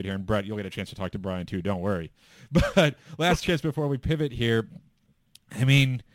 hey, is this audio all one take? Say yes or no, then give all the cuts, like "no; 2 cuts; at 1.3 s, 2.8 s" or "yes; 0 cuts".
yes; 0 cuts